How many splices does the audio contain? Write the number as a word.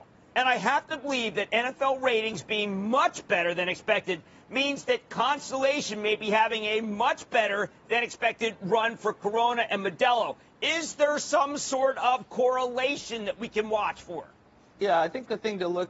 zero